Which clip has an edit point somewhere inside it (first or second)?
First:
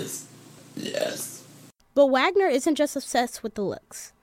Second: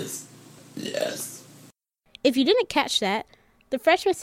first